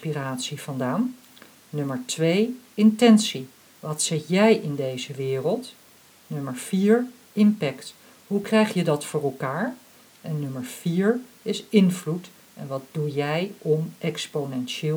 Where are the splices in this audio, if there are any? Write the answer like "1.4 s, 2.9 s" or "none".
none

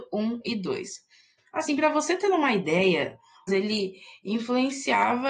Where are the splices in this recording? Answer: 1.4 s, 3.5 s

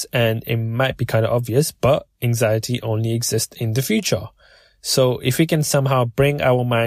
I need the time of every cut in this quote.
none

